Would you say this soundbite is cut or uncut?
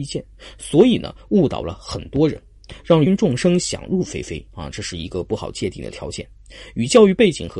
cut